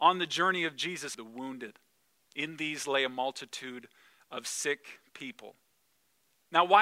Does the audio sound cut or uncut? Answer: cut